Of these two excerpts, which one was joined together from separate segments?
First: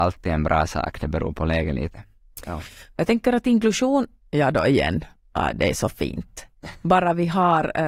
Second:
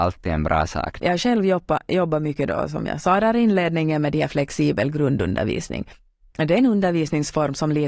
second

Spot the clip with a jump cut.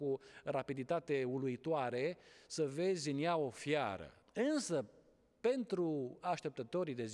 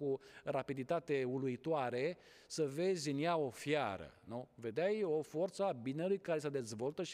first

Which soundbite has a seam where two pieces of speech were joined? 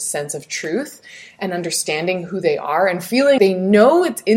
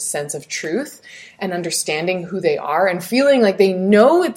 first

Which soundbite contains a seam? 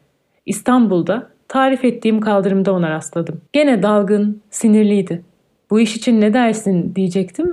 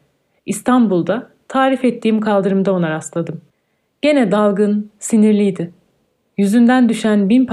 first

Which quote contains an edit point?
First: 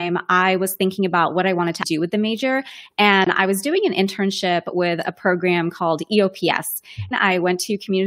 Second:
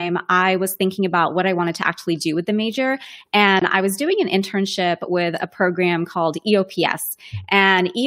first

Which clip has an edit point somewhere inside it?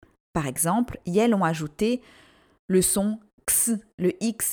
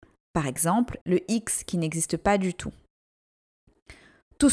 second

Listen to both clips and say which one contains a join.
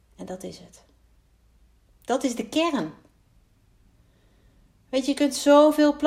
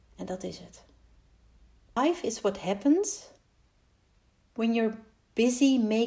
second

